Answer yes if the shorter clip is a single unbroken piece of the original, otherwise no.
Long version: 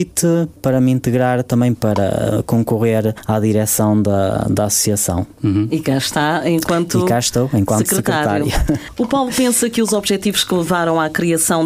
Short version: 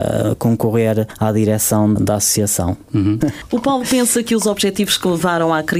no